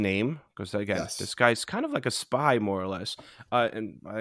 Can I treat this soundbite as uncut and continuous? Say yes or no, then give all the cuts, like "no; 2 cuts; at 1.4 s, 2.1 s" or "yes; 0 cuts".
yes; 0 cuts